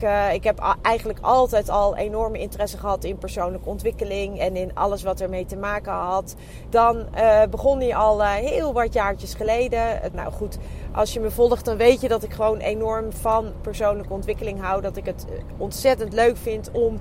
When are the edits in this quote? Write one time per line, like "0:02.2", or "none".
0:06.7
0:10.1